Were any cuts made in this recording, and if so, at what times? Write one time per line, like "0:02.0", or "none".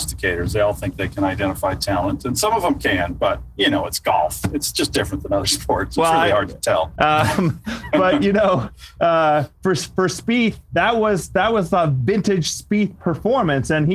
0:07.0